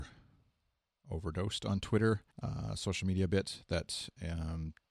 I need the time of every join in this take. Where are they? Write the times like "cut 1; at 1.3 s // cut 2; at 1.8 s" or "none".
cut 1; at 2.3 s